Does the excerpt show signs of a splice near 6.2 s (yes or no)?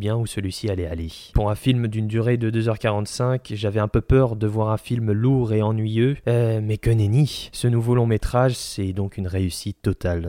no